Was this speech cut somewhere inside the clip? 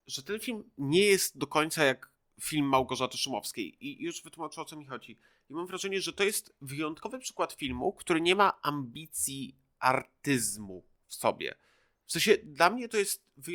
no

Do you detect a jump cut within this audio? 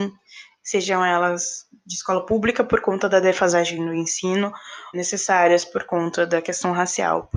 yes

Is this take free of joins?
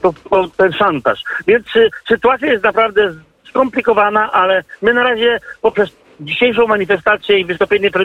yes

